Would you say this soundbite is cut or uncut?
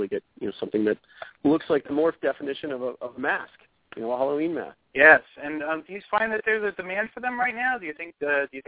cut